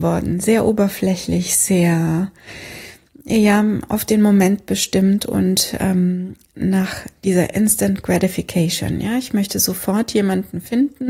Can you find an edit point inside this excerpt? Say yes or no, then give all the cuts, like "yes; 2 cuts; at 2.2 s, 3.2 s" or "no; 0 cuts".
no; 0 cuts